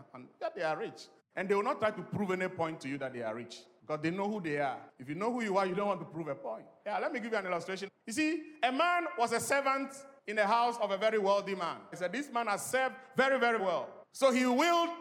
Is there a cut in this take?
yes; 2 cuts; at 11.9 s, 13.6 s

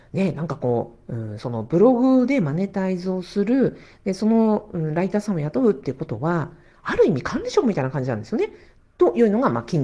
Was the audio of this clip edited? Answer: yes; 1 cut; at 8.8 s

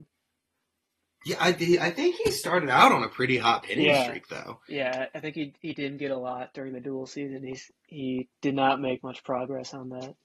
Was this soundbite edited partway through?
no; 0 cuts

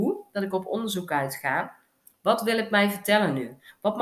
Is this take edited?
no; 0 cuts

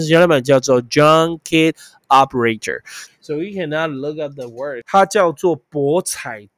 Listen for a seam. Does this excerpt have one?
yes; 2 cuts; at 3.1 s, 4.8 s

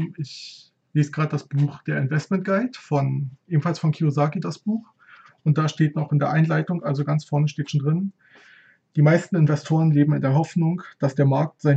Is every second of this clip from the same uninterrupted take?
yes; 0 cuts

